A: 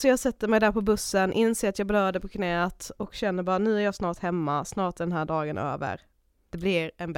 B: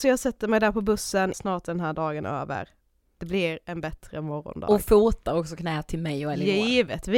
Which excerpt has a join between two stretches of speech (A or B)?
B